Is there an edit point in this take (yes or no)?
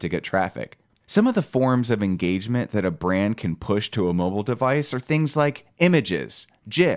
yes